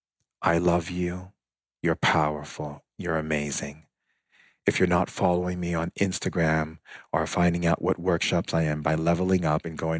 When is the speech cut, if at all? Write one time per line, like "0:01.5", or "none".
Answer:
none